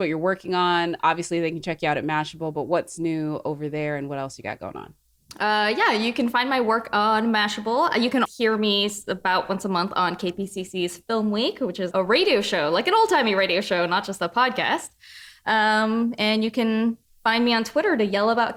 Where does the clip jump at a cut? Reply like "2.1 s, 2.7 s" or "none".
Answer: 8.2 s, 11.9 s

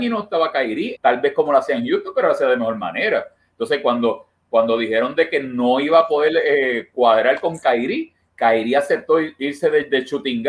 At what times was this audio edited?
0.9 s

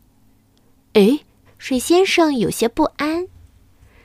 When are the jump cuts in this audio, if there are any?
1.4 s

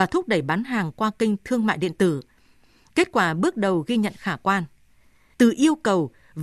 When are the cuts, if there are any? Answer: 5.3 s

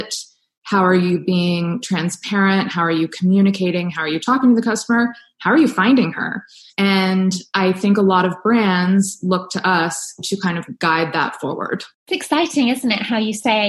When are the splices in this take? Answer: 11.9 s

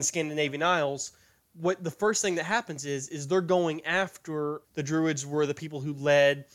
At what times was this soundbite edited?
4.6 s

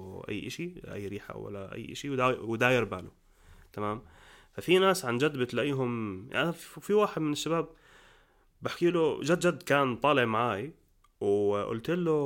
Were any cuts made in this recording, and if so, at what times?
none

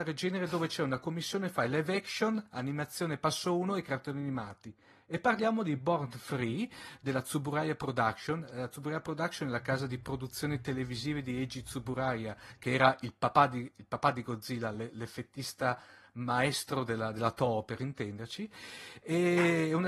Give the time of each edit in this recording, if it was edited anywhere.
none

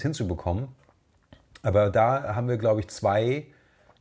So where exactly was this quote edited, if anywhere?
none

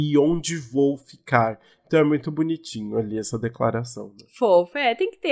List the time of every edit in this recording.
none

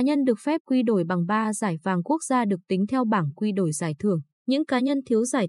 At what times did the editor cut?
4.3 s

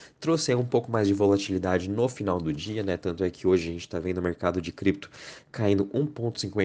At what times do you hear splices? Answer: none

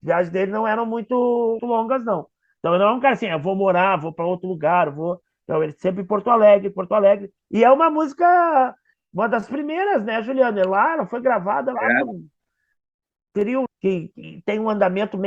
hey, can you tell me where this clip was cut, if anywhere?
1.6 s, 7.4 s, 13.7 s

